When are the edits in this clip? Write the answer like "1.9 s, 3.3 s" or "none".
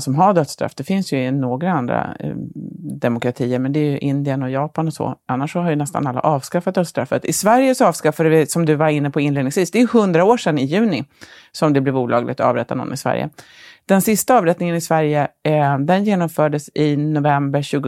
none